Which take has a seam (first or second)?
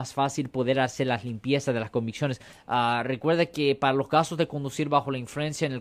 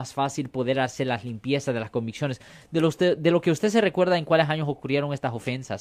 first